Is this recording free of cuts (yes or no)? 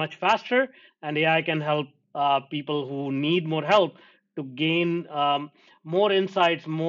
yes